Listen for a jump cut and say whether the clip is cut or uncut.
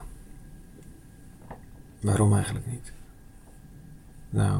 uncut